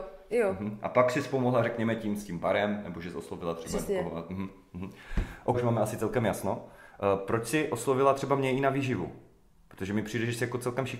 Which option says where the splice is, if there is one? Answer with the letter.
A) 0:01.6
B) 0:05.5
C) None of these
B